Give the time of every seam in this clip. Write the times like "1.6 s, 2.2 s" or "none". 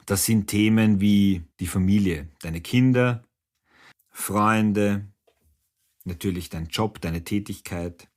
1.5 s, 3.9 s